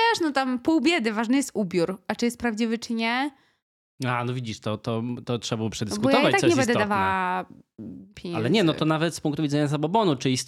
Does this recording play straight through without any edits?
yes; 0 cuts

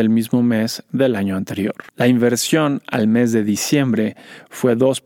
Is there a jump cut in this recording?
yes; 1 cut; at 1.9 s

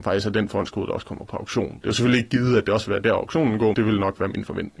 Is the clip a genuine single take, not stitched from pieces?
no; 2 cuts; at 1.8 s, 3.7 s

